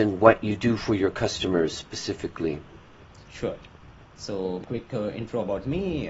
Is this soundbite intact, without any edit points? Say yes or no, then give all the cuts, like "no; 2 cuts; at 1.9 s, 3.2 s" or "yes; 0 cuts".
yes; 0 cuts